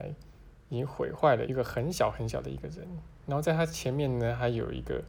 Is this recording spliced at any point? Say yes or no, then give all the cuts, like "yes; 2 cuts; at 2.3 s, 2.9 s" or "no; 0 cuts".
yes; 1 cut; at 1.4 s